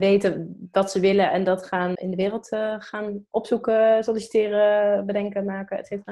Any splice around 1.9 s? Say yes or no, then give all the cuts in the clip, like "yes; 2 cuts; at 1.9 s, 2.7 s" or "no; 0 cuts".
yes; 1 cut; at 1.9 s